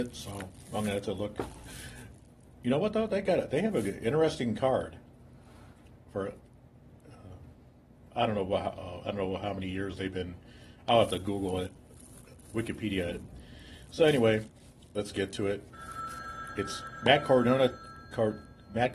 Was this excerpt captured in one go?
yes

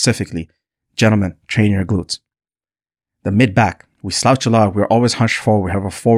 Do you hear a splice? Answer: no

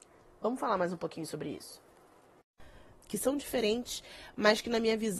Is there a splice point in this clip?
yes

